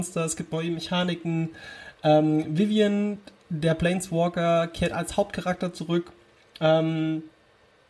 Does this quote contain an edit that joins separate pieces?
no; 0 cuts

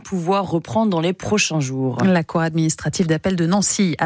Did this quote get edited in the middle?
no; 0 cuts

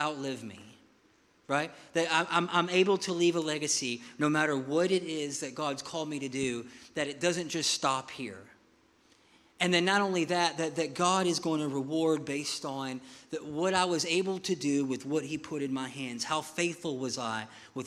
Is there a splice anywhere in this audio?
no; 0 cuts

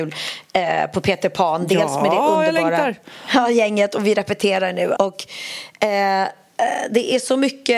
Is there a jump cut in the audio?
yes; 1 cut; at 5.0 s

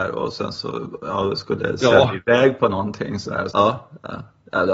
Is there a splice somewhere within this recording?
yes; 1 cut; at 3.5 s

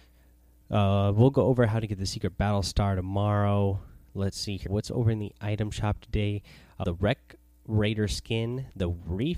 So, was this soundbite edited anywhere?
yes; 2 cuts; at 4.7 s, 6.8 s

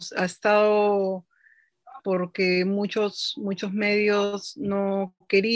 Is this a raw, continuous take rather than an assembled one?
no; 1 cut; at 2.0 s

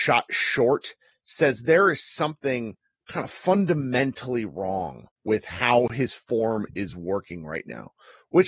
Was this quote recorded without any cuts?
no; 2 cuts; at 3.0 s, 6.7 s

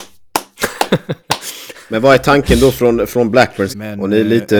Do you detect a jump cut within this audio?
yes; 1 cut; at 3.7 s

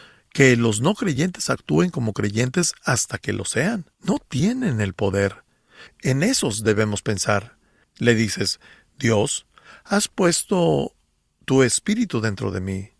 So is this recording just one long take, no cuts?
no; 3 cuts; at 3.9 s, 5.9 s, 7.8 s

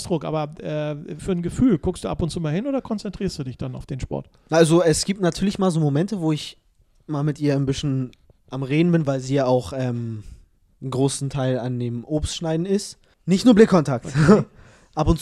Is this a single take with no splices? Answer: no; 2 cuts; at 1.2 s, 13.1 s

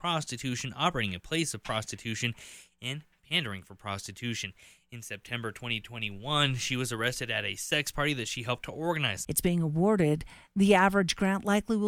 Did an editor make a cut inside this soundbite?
yes; 1 cut; at 9.2 s

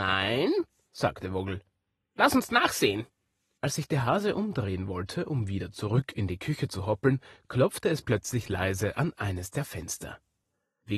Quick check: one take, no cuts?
yes; 0 cuts

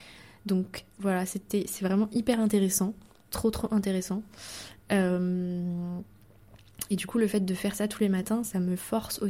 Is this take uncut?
yes; 0 cuts

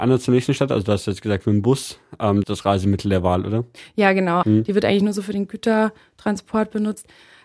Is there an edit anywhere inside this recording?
yes; 2 cuts; at 2.4 s, 4.4 s

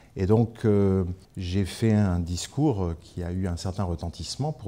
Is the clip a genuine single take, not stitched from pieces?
no; 1 cut; at 1.2 s

